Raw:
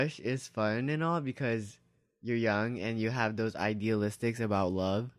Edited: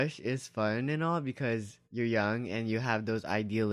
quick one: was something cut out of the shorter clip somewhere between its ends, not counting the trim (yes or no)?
yes